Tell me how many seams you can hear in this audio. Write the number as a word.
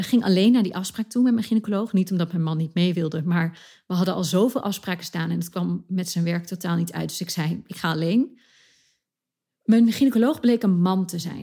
zero